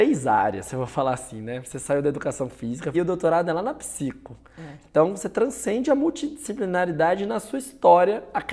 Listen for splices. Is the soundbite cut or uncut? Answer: cut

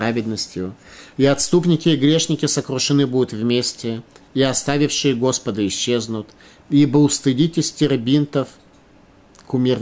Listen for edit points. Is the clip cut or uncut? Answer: uncut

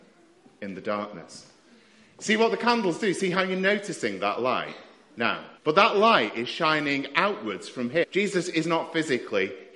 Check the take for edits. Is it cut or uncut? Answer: cut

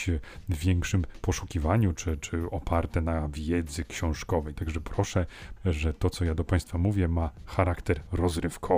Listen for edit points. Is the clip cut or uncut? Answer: cut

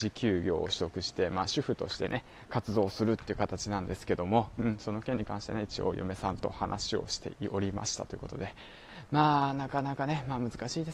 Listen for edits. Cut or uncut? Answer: uncut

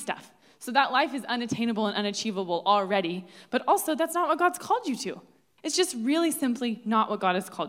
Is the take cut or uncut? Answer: uncut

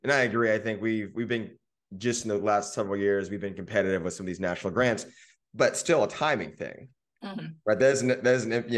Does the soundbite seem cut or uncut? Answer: uncut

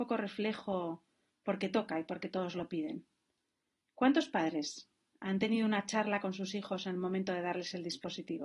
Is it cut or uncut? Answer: uncut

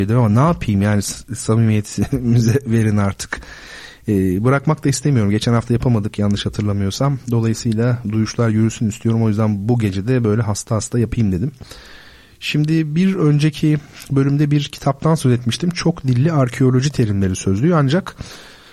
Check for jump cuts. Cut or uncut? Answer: uncut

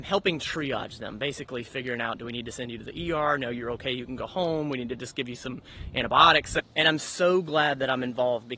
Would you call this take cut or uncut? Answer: uncut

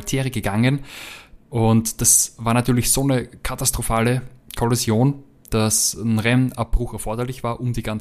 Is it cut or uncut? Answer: cut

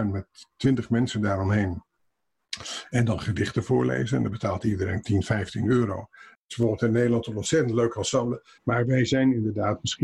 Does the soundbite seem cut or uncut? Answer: cut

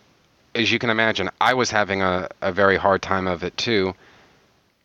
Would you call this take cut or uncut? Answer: uncut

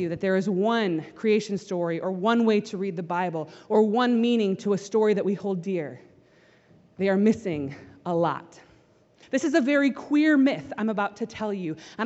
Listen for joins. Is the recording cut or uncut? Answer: cut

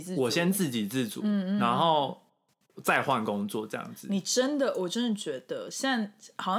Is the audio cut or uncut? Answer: uncut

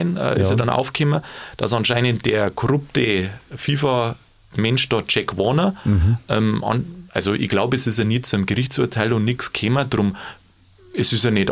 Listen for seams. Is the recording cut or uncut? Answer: uncut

